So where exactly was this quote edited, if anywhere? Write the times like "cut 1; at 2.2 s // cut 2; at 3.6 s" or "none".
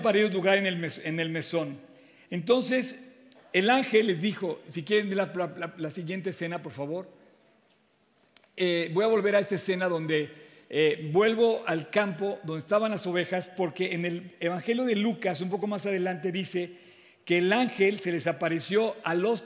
none